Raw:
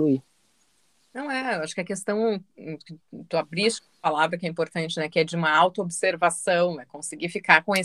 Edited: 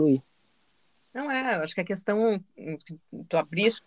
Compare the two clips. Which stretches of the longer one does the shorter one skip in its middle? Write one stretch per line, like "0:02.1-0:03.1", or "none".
none

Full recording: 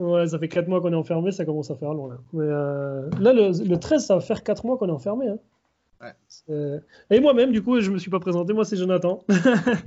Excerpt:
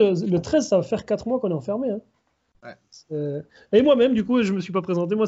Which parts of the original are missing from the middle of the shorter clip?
none

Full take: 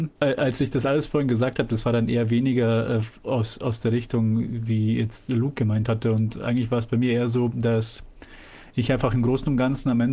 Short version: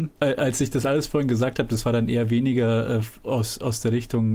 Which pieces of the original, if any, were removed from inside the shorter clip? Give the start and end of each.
none

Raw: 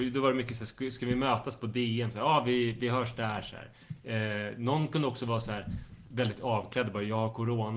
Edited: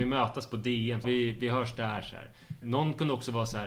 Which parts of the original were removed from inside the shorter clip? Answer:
0:02.1-0:02.4
0:04.0-0:04.6

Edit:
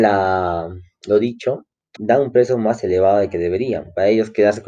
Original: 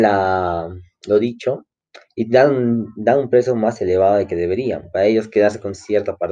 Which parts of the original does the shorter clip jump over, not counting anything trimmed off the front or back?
0:02.0-0:02.9

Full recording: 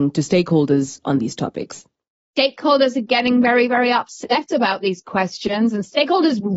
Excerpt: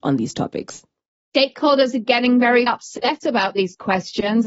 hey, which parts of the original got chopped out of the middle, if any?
0:03.7-0:03.9

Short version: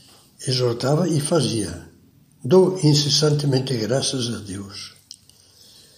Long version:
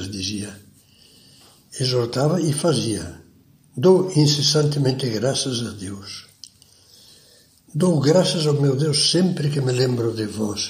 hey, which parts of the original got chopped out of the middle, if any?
none

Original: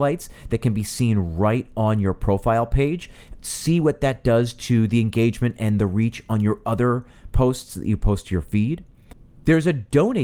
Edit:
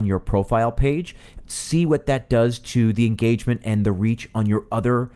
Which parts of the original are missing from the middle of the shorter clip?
none

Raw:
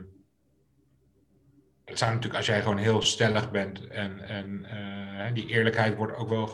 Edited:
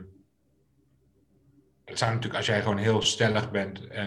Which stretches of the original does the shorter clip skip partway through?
none

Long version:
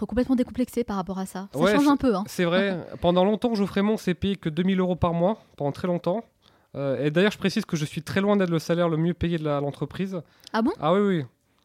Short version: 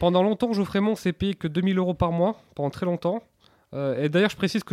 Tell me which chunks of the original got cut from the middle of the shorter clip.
none

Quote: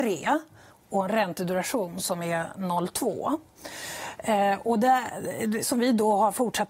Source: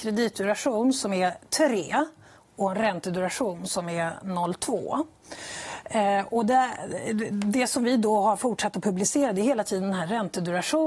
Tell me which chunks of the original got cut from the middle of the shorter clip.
0:07.3-0:07.7

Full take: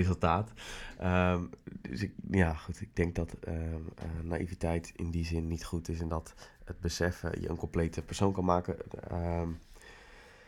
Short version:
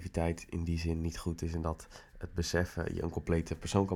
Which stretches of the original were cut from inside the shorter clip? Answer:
none

